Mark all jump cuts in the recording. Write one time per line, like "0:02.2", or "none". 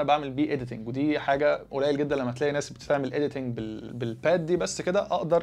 0:03.9